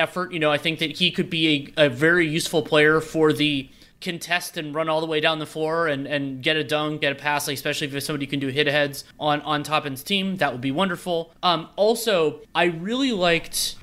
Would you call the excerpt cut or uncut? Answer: uncut